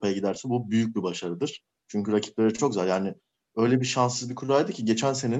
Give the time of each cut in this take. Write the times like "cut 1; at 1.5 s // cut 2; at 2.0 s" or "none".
none